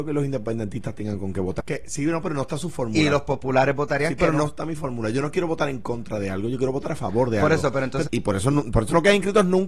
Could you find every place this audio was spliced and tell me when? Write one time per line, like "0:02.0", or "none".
0:01.6
0:08.0